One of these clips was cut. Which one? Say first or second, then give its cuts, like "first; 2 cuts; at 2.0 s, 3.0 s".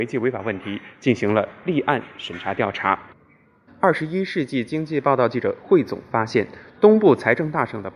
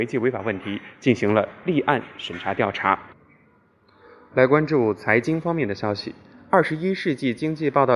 first; 1 cut; at 3.7 s